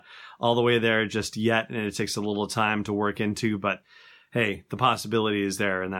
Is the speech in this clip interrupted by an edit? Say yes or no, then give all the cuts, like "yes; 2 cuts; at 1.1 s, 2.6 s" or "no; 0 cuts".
no; 0 cuts